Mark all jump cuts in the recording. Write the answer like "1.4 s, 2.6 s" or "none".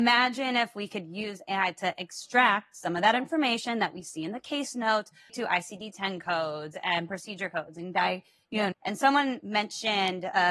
5.3 s, 8.7 s